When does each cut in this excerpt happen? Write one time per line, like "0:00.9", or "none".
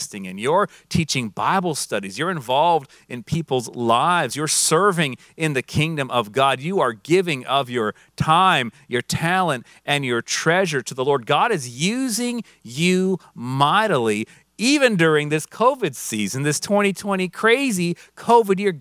none